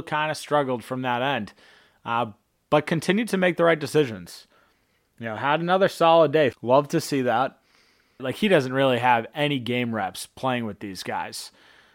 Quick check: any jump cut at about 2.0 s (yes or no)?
no